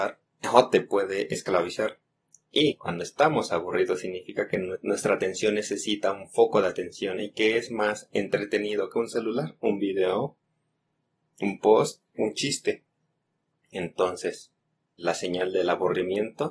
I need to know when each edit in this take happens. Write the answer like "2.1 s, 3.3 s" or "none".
12.1 s, 15.0 s